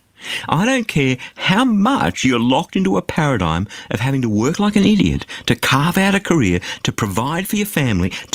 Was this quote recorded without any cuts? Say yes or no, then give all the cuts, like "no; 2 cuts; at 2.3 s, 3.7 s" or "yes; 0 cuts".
yes; 0 cuts